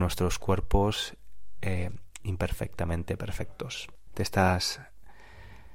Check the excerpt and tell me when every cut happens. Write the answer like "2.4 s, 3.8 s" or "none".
4.1 s